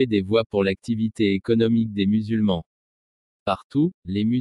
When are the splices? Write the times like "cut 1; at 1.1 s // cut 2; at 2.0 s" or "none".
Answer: cut 1; at 3.2 s